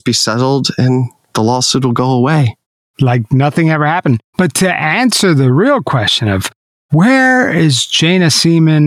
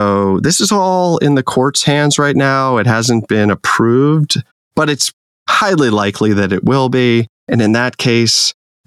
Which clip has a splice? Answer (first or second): first